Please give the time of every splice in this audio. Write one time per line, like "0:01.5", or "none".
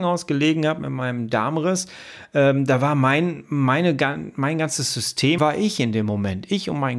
0:05.4